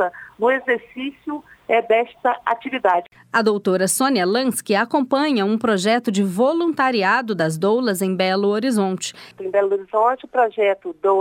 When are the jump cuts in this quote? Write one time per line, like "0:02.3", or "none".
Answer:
0:09.3